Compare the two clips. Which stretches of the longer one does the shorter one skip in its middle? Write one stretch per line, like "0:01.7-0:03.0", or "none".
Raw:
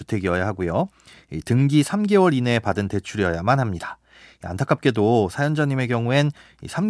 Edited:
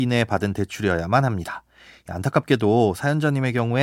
none